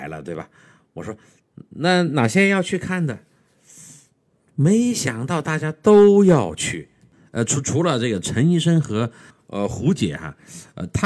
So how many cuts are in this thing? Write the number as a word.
zero